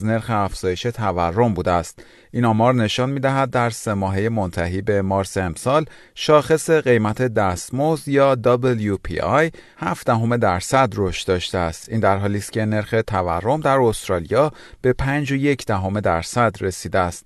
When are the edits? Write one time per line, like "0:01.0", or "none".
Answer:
none